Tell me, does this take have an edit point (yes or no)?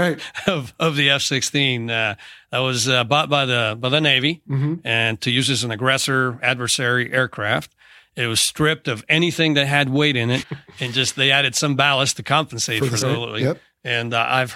yes